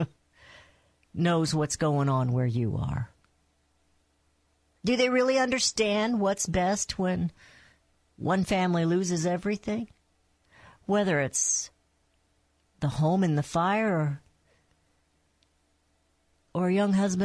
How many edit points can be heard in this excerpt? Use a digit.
1